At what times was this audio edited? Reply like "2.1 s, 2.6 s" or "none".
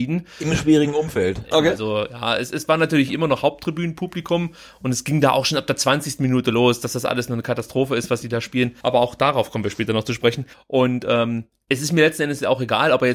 1.5 s, 8.8 s, 10.5 s